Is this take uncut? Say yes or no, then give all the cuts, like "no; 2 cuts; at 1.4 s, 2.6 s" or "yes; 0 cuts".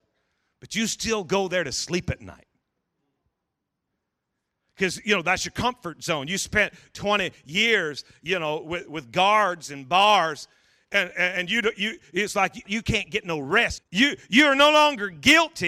no; 2 cuts; at 12.7 s, 13.8 s